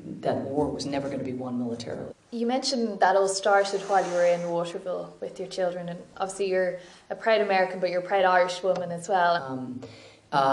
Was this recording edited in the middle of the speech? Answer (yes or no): yes